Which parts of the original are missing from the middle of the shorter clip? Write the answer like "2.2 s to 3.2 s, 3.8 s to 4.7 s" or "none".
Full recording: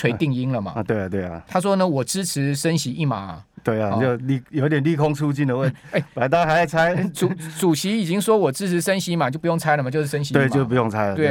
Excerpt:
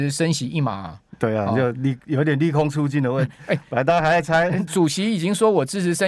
7.1 s to 7.5 s